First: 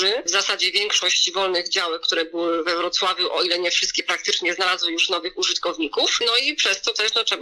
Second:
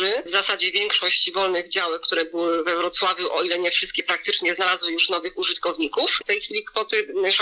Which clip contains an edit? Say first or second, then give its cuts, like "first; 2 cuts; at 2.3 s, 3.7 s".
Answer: second; 1 cut; at 6.2 s